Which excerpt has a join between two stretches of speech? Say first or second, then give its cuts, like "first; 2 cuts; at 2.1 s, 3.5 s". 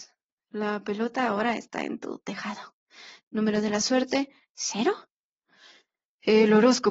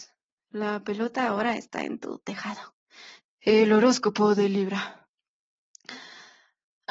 second; 1 cut; at 3.2 s